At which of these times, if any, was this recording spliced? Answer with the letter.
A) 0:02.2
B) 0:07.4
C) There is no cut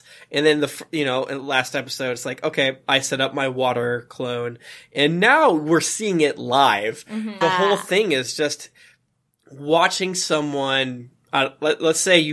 B